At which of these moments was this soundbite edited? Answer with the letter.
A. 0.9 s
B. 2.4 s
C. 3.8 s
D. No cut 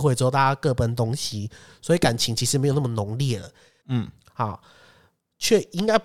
C